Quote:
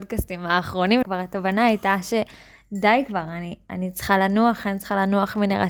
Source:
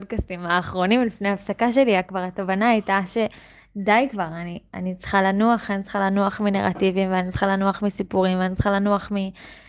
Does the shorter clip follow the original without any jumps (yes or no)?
no